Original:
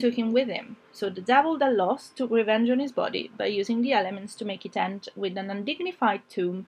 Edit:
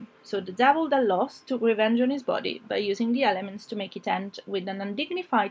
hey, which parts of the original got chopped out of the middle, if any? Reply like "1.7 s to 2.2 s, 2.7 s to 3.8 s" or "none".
none